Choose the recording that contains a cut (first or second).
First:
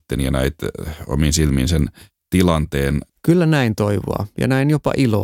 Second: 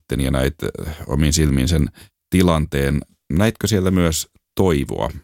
first